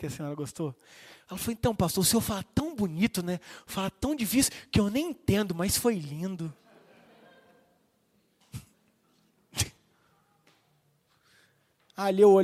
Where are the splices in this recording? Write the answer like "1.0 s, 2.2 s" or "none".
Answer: none